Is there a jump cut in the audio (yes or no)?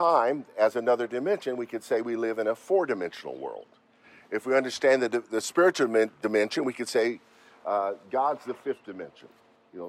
no